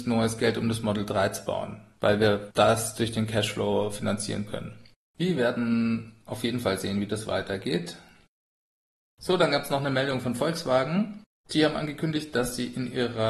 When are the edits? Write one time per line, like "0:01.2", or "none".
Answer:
none